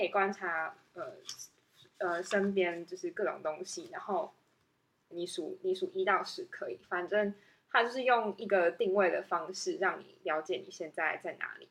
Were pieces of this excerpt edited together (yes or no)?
yes